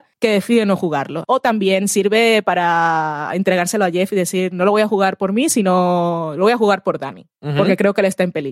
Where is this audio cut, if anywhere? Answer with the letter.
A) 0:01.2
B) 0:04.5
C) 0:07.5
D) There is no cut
A